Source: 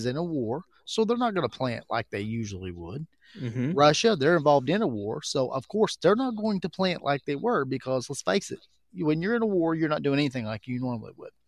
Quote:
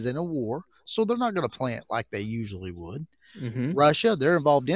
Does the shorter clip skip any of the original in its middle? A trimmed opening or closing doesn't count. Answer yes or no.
no